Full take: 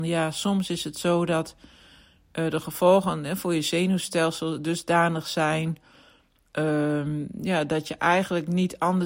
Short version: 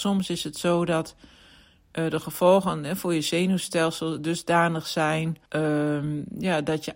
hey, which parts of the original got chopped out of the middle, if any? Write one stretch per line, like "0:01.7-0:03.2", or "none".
0:05.9-0:06.5